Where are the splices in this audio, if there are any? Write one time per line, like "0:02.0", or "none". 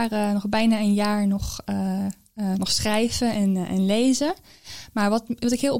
none